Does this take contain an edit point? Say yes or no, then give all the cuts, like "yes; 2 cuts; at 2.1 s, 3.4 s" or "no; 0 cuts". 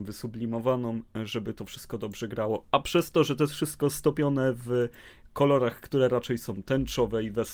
no; 0 cuts